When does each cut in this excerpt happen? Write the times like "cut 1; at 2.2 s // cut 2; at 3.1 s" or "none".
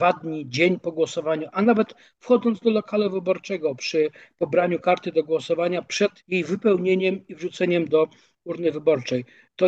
cut 1; at 6.2 s